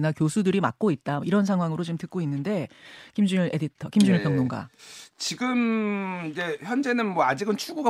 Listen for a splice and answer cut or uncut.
uncut